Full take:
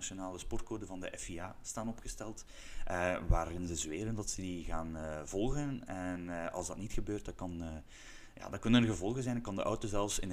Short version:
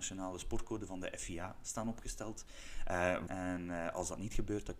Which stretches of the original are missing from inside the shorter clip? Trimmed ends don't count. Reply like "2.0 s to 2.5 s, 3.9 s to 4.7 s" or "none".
3.3 s to 5.9 s